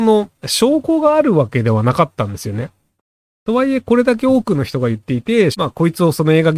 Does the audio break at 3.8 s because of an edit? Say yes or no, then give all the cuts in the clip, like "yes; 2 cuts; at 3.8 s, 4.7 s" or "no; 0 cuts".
no; 1 cut; at 5.5 s